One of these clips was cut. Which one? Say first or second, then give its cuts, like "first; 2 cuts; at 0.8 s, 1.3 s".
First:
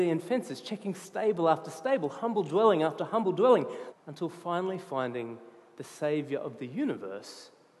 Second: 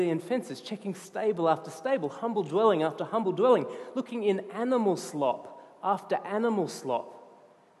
first; 1 cut; at 3.9 s